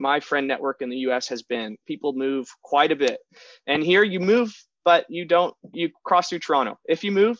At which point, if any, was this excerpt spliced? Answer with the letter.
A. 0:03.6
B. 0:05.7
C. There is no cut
B